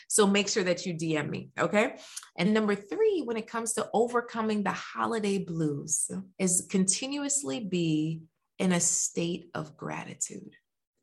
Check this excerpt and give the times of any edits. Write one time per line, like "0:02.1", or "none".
0:02.4
0:06.3